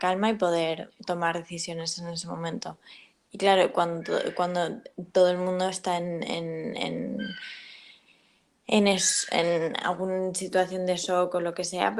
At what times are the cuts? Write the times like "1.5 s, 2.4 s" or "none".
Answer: 3.3 s